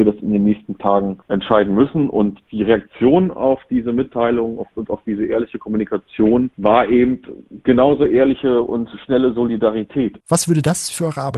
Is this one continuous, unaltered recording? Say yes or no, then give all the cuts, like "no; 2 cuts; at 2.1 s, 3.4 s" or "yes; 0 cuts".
no; 3 cuts; at 1.2 s, 6.5 s, 10.2 s